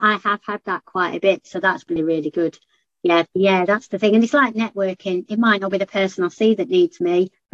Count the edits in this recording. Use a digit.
2